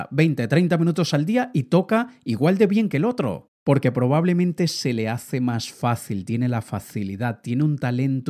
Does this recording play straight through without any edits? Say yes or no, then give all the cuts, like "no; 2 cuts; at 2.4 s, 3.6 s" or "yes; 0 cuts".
yes; 0 cuts